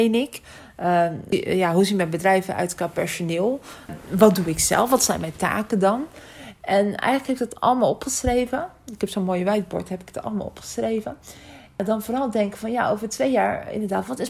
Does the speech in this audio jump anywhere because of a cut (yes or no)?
no